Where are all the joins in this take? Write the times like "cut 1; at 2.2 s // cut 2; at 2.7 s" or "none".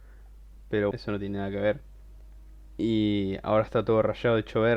cut 1; at 0.9 s